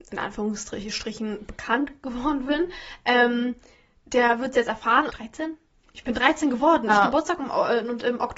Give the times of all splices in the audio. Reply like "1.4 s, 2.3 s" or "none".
5.1 s, 6.9 s